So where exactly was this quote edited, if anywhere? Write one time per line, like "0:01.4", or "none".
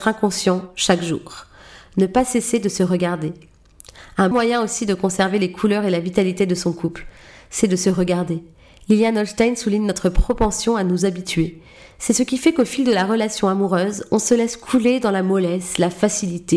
0:04.3